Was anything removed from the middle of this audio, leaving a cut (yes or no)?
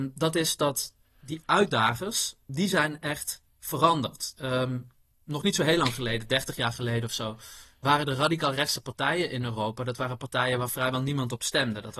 yes